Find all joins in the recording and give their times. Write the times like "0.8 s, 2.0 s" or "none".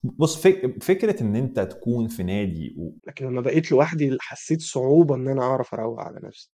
3.0 s